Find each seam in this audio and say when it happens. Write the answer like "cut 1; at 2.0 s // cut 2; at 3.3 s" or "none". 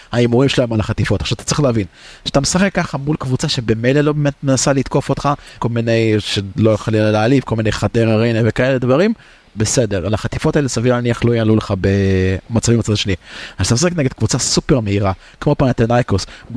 cut 1; at 5.6 s